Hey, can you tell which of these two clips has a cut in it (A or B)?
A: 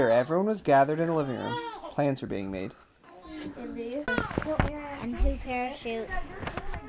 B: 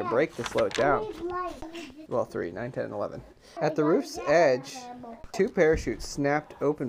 B